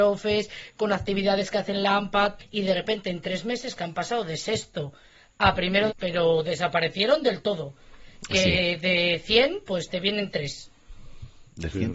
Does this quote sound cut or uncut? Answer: cut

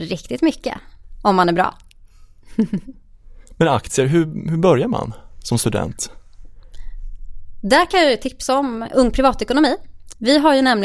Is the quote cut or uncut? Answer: uncut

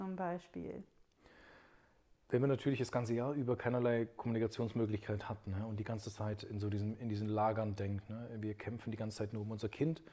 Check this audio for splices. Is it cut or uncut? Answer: uncut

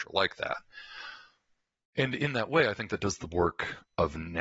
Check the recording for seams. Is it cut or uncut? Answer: uncut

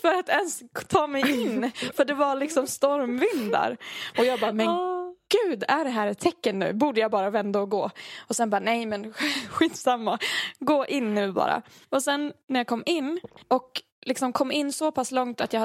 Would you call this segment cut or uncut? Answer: uncut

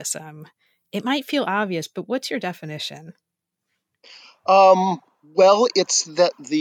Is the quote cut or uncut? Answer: uncut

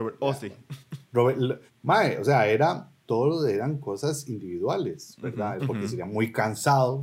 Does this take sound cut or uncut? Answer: cut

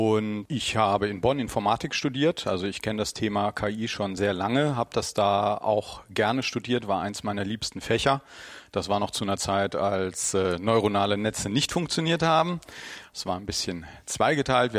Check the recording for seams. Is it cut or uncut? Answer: cut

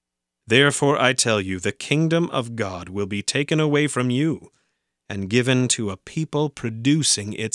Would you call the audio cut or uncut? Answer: uncut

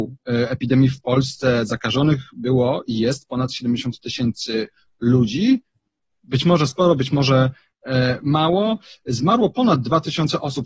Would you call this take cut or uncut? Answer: uncut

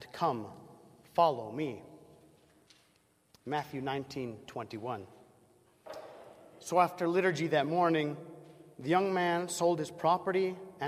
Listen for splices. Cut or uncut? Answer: uncut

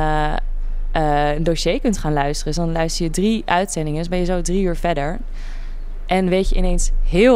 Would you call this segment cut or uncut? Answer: uncut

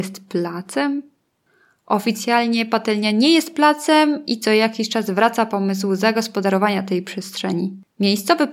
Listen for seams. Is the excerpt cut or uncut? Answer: uncut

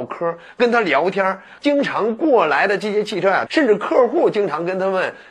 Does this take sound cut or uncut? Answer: cut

